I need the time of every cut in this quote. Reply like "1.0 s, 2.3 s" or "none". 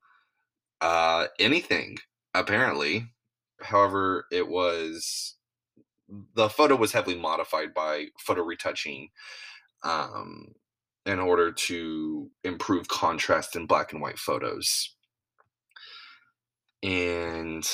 3.6 s